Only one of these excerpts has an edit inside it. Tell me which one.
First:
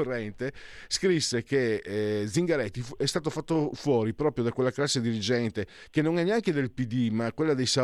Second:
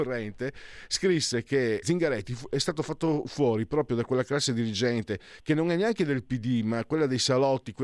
second; 1 cut; at 1.8 s

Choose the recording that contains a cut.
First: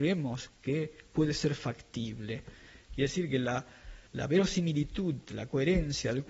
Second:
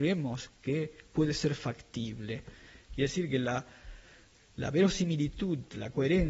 first; 1 cut; at 4.1 s

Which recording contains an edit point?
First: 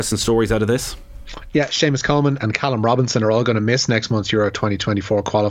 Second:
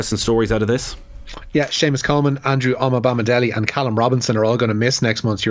first; 1 cut; at 2.4 s

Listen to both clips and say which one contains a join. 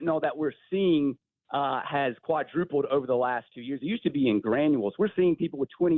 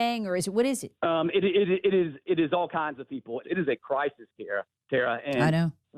second; 2 cuts; at 1.0 s, 3.4 s

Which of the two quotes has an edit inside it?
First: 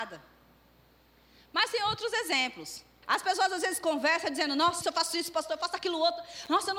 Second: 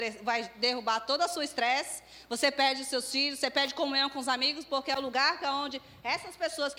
first; 2 cuts; at 3.0 s, 4.8 s

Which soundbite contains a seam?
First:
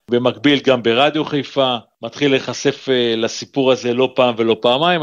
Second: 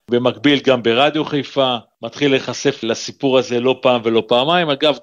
second; 1 cut; at 2.8 s

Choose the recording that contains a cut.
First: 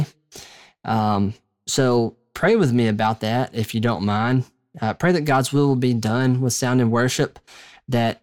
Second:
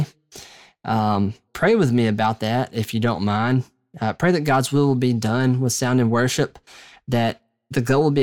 second; 1 cut; at 1.5 s

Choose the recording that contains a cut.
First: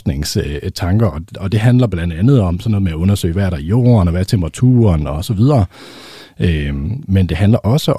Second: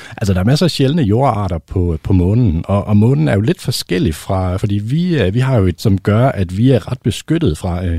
second; 2 cuts; at 4.6 s, 5.8 s

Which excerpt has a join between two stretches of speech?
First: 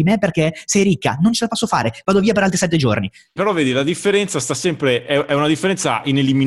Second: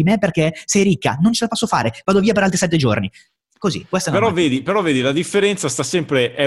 first; 1 cut; at 3.4 s

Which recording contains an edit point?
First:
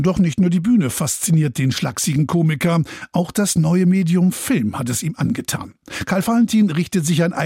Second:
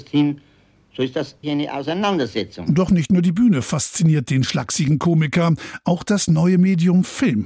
second; 1 cut; at 1.4 s

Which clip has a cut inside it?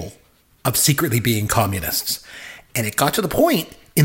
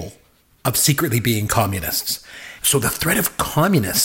second; 1 cut; at 2.6 s

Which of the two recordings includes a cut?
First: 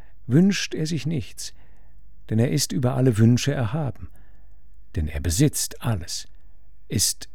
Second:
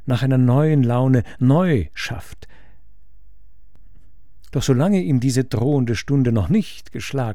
second; 1 cut; at 4.5 s

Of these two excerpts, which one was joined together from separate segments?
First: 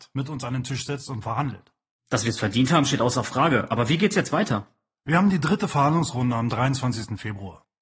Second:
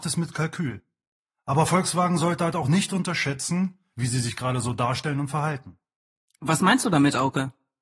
second; 1 cut; at 3.9 s

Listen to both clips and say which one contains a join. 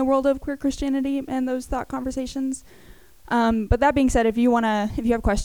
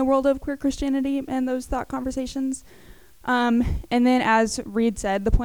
second; 1 cut; at 3.1 s

